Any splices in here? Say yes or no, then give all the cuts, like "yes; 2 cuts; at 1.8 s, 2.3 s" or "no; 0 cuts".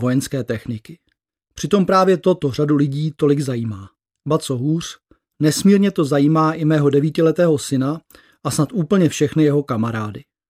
no; 0 cuts